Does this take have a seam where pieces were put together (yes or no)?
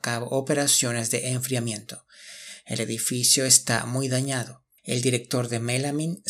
yes